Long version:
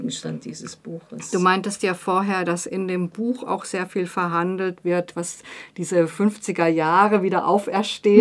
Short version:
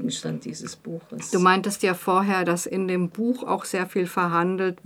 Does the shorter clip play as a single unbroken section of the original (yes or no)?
yes